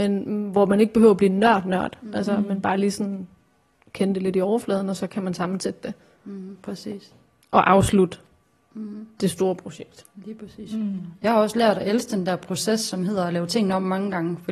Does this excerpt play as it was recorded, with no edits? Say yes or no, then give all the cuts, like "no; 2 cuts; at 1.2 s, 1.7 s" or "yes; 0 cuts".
yes; 0 cuts